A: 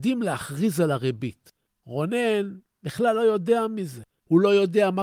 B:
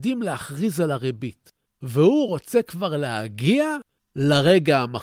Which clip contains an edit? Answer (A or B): B